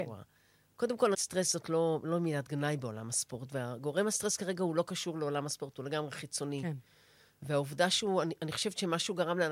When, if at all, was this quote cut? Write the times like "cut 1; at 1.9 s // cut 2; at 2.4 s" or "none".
cut 1; at 1.1 s